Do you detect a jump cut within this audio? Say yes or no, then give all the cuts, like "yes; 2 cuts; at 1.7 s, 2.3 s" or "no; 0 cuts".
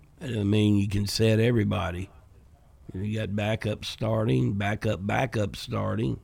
no; 0 cuts